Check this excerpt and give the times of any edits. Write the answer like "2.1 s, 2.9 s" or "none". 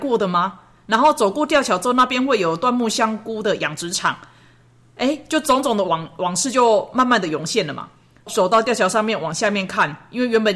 none